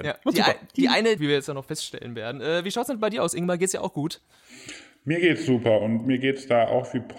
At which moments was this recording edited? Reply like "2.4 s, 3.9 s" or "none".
1.2 s